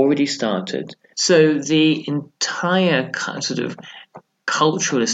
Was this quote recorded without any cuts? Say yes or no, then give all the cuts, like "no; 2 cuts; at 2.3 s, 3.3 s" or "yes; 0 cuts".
no; 1 cut; at 1.1 s